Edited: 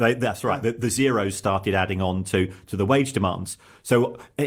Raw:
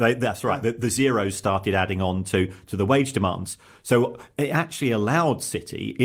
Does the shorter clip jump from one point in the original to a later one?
no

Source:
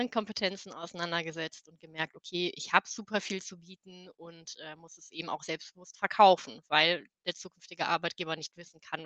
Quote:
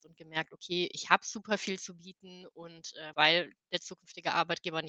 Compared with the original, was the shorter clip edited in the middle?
yes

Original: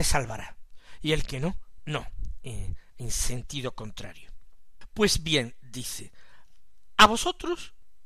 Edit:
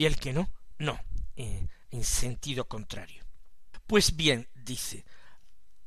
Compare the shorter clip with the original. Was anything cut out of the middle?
no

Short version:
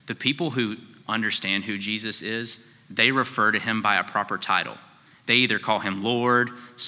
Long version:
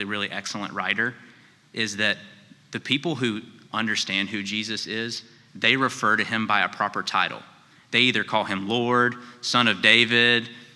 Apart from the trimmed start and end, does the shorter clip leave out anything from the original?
no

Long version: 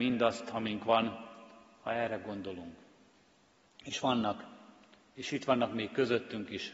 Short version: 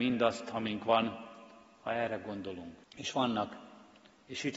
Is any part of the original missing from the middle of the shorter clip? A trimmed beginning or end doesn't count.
yes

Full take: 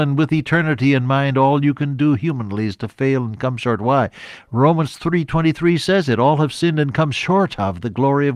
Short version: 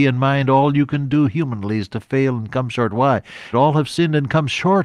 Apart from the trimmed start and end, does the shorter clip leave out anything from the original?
yes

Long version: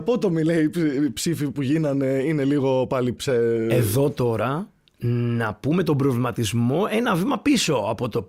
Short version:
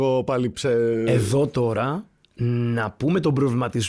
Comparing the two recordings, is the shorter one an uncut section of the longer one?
yes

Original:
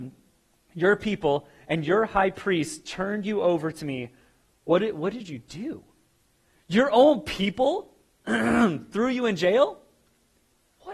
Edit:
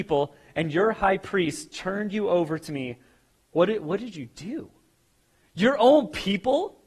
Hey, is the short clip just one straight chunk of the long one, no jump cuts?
yes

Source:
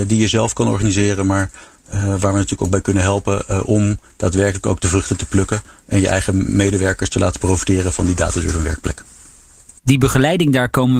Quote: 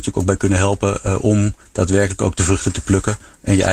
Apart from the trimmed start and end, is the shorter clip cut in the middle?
no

